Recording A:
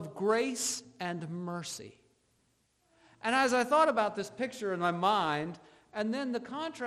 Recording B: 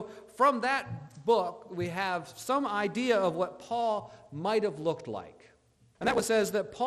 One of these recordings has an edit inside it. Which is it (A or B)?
B